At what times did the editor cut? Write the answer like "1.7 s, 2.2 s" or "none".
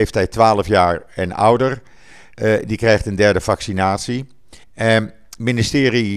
4.6 s